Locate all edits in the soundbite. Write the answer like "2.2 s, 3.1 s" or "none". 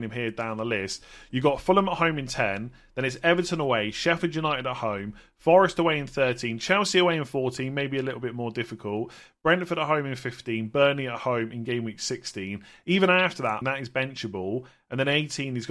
13.6 s